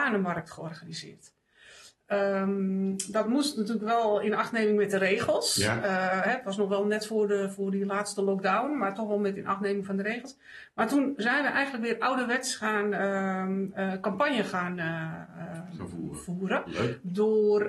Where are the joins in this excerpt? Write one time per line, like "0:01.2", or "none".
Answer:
none